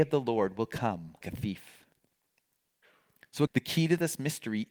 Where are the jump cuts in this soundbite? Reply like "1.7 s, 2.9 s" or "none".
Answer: 1.2 s, 3.5 s